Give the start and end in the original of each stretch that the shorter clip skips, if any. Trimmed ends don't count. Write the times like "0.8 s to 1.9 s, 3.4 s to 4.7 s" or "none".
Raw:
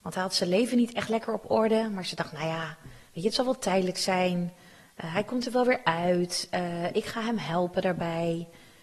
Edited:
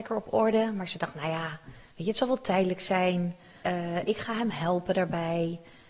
4.8 s to 6.5 s